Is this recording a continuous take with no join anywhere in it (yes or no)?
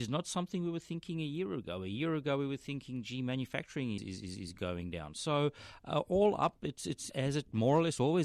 no